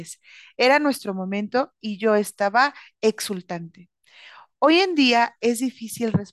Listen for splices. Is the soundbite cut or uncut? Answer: uncut